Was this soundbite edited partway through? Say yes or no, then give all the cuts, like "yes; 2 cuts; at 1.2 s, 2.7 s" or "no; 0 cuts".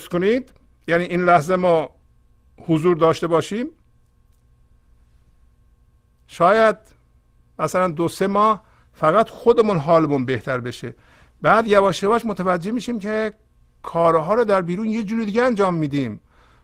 no; 0 cuts